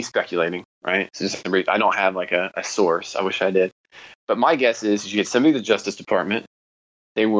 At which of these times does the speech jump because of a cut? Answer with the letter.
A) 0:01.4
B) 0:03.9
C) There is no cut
C